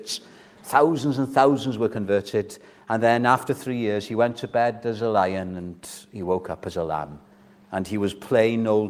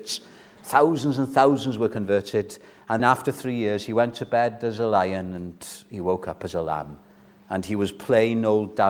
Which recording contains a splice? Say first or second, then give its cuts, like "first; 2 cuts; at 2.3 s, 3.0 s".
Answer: second; 1 cut; at 3.0 s